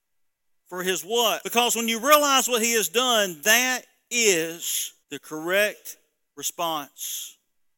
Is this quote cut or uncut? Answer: cut